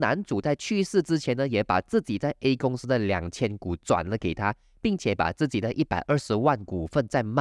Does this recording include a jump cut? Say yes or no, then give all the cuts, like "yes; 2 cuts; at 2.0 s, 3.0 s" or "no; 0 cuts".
no; 0 cuts